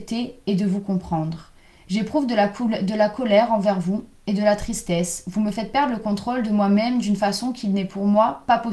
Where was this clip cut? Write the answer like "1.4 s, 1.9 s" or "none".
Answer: none